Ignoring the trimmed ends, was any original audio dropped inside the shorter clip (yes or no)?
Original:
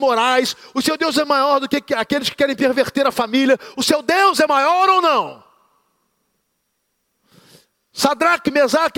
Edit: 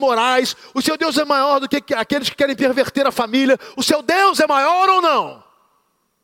no